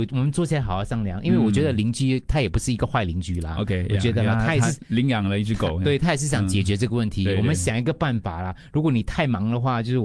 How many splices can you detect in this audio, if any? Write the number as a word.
zero